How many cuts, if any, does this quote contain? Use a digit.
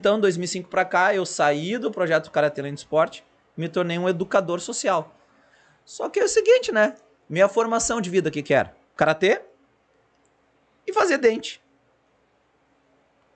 1